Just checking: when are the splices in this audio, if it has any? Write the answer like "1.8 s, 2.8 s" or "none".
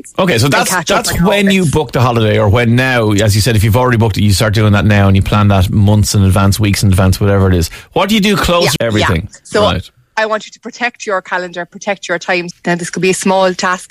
8.8 s, 12.5 s

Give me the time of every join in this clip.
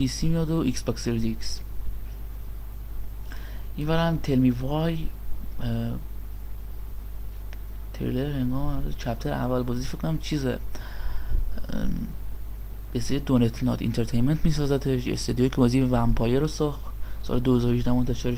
none

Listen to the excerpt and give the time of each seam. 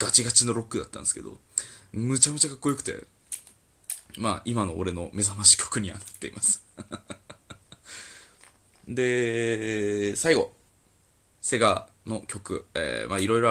none

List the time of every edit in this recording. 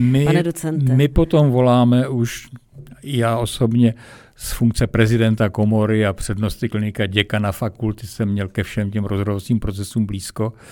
none

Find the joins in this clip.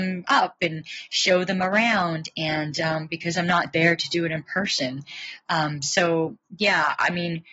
none

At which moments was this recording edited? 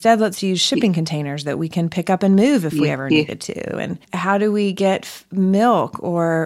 none

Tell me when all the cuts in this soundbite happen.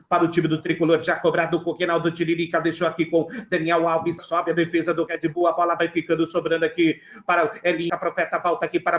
4.2 s, 7.9 s

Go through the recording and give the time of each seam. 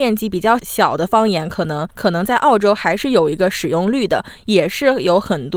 none

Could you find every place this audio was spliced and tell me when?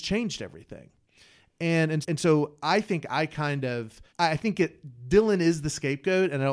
2.0 s, 4.1 s

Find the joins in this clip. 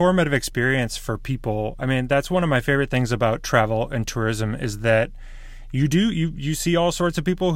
none

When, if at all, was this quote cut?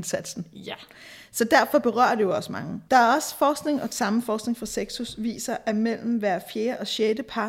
2.9 s

